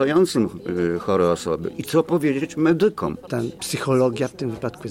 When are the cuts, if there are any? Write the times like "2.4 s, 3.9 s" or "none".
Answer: 3.3 s